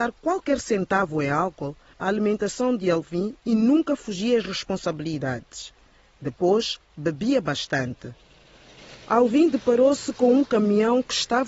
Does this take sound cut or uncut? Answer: cut